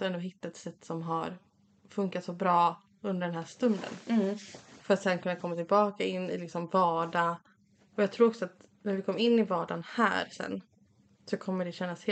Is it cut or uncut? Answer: uncut